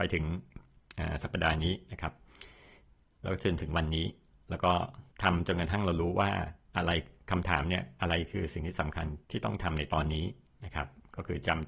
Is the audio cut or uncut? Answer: cut